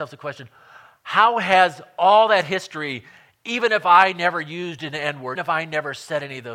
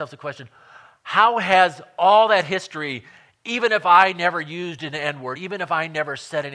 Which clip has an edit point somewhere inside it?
first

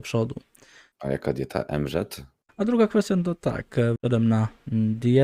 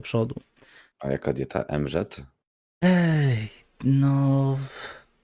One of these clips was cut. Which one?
first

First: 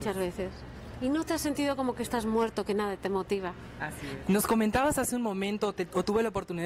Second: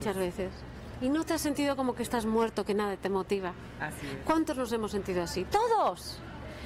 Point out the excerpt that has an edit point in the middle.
first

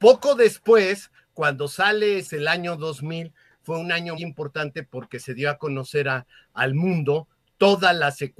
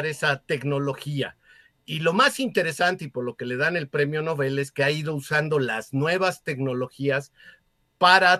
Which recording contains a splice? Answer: first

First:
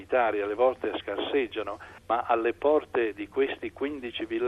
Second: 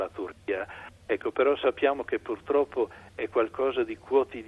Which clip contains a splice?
first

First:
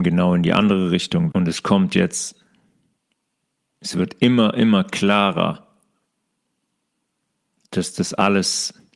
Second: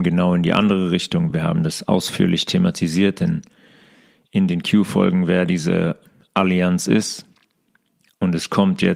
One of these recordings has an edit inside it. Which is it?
first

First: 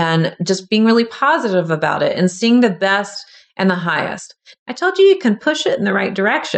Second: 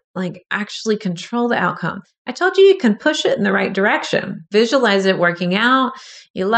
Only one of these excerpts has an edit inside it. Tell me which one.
first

